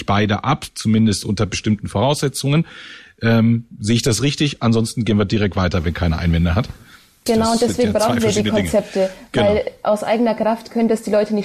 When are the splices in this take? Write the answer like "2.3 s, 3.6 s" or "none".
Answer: 7.3 s